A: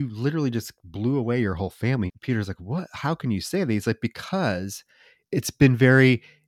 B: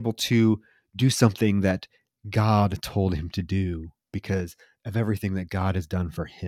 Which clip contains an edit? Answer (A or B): A